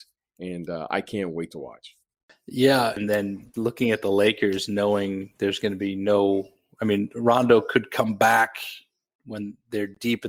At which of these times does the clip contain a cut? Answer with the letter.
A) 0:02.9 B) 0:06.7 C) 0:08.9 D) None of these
A